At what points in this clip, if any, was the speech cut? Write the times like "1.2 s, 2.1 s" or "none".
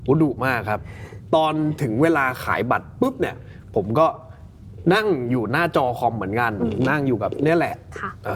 none